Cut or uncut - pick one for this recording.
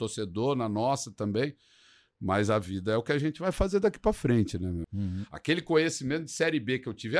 cut